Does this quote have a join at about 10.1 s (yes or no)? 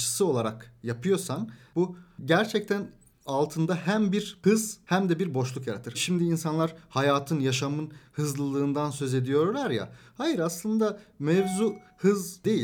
no